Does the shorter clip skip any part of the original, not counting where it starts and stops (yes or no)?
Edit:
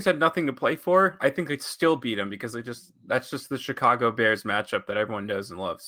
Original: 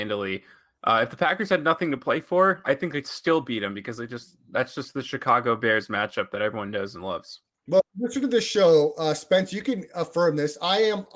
no